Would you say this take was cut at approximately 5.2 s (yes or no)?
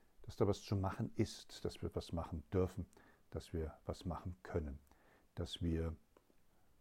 no